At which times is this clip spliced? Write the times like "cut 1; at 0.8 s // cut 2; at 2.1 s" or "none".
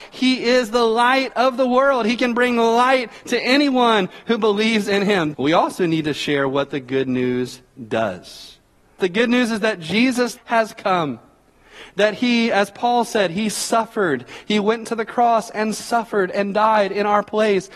cut 1; at 5.3 s // cut 2; at 9.0 s // cut 3; at 10.4 s

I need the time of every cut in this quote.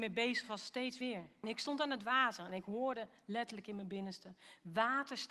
cut 1; at 1.4 s

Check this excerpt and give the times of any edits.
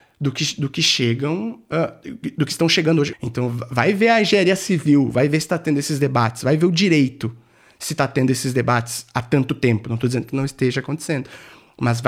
cut 1; at 3.1 s

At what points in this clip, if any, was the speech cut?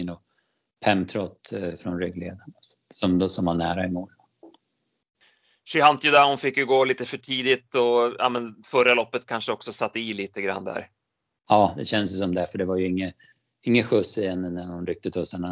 none

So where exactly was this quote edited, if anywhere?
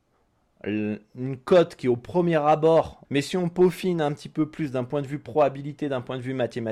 cut 1; at 3.0 s

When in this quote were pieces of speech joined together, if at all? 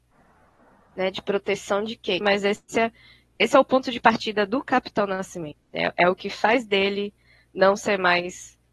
cut 1; at 2.2 s

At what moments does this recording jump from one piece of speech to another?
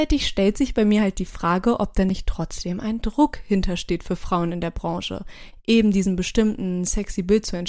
none

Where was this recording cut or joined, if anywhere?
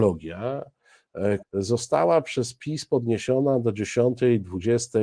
cut 1; at 1.4 s

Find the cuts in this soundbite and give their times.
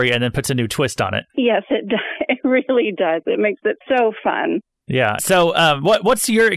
cut 1; at 1.3 s // cut 2; at 3.8 s // cut 3; at 5.2 s

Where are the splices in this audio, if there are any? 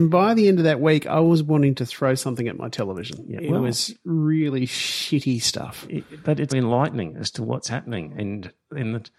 cut 1; at 6.5 s

